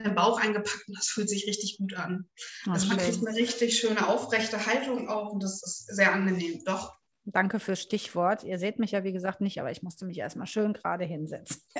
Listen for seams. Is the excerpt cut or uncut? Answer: uncut